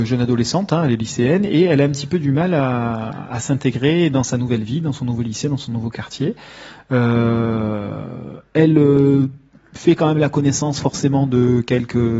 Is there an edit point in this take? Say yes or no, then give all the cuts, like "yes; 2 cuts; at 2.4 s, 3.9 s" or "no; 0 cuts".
no; 0 cuts